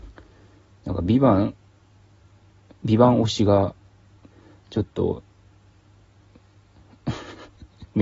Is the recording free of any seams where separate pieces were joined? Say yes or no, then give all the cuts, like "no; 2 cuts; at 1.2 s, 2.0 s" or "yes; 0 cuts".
yes; 0 cuts